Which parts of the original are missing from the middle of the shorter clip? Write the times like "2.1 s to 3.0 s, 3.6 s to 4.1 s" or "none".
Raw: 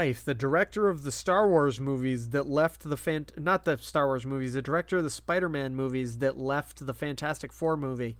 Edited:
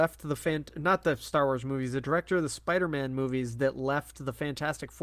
none